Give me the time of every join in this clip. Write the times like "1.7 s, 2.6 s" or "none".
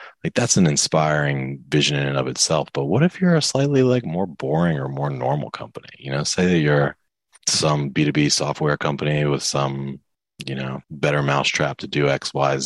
7.4 s, 10.8 s